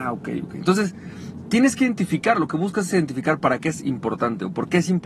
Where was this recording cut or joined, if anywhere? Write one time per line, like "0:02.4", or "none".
none